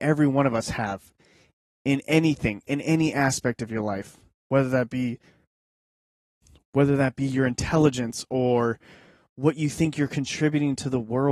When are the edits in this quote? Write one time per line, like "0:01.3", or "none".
0:04.4